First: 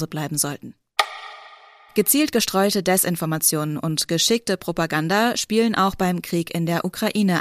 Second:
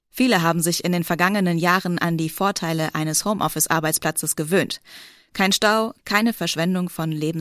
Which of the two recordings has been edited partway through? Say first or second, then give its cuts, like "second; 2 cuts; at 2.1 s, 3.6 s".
second; 1 cut; at 6.0 s